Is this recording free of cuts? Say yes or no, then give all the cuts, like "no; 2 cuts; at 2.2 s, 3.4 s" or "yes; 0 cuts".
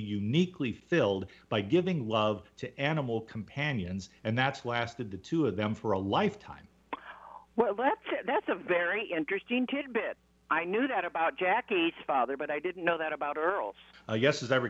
yes; 0 cuts